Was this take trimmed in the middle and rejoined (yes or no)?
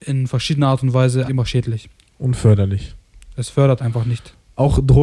yes